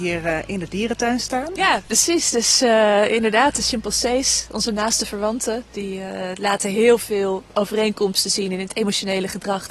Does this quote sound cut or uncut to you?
uncut